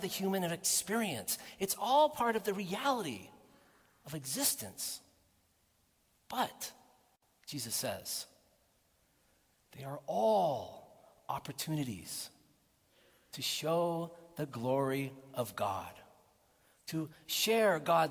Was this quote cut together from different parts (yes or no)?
no